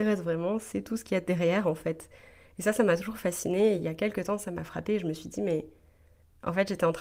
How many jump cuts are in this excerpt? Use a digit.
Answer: 0